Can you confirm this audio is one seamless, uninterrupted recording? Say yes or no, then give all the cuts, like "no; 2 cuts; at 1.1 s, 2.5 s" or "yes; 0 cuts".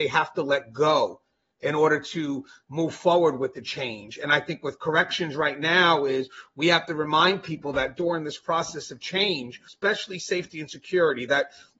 no; 1 cut; at 9.7 s